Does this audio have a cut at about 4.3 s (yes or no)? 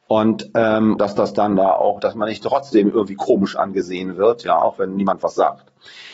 no